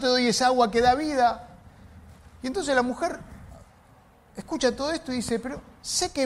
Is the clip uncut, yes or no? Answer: yes